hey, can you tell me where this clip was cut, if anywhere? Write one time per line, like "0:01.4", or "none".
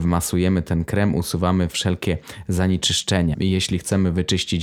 0:03.3